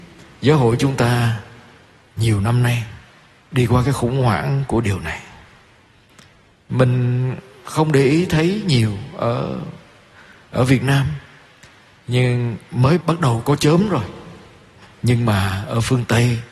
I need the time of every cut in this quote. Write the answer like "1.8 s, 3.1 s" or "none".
13.0 s